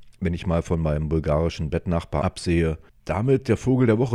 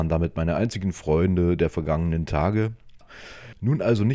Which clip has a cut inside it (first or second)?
second